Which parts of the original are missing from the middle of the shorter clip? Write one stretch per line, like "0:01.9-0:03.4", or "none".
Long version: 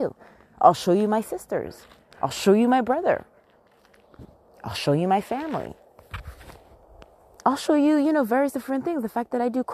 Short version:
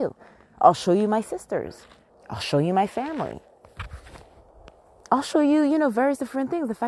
0:02.1-0:04.4